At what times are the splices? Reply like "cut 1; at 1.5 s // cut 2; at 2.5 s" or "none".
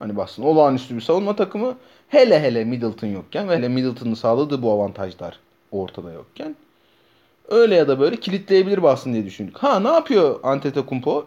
cut 1; at 3.6 s